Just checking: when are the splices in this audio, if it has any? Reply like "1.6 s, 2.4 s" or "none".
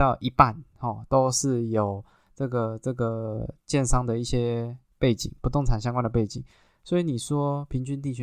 none